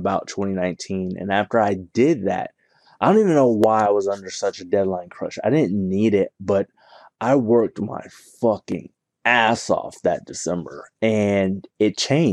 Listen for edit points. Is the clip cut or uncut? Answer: uncut